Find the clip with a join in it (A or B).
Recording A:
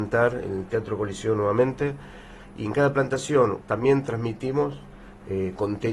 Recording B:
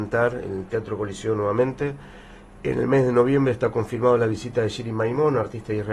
A